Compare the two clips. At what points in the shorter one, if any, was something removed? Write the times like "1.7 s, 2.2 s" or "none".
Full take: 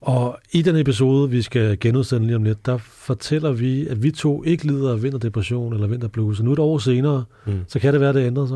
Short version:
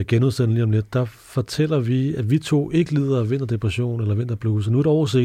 none